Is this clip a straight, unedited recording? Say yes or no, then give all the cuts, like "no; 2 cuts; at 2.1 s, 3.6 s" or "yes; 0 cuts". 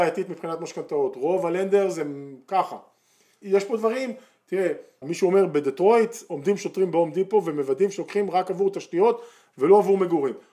no; 2 cuts; at 3.4 s, 5.0 s